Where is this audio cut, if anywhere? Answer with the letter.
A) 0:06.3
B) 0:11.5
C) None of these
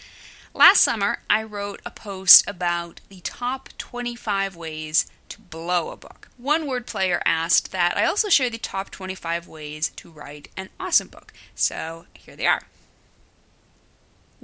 C